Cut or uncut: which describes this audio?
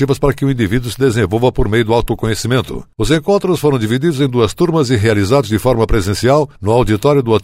uncut